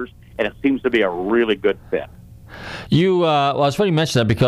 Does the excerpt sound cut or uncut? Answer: uncut